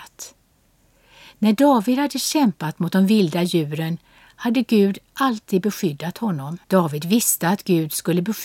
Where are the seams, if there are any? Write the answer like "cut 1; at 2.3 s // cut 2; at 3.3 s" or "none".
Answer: cut 1; at 6.6 s